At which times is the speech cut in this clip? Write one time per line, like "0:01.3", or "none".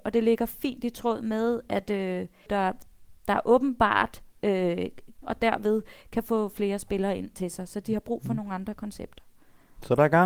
0:02.5
0:05.2